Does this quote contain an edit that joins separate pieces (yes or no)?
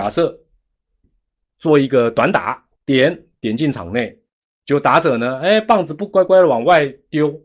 yes